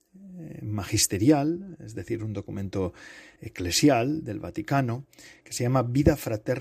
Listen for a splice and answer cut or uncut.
uncut